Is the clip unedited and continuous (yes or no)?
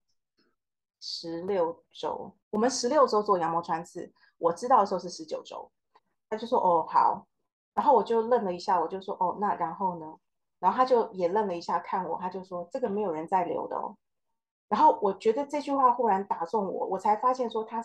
no